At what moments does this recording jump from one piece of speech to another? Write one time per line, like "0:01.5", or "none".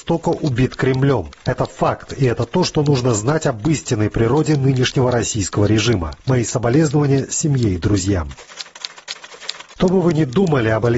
0:09.8